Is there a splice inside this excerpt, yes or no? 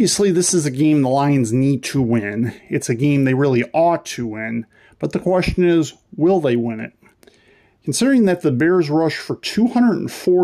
no